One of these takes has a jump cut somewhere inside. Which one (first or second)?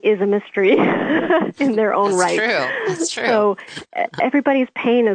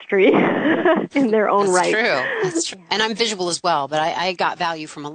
second